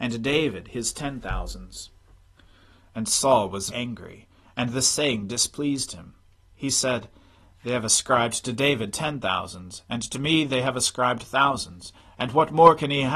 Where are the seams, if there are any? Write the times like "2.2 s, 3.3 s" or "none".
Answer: 3.7 s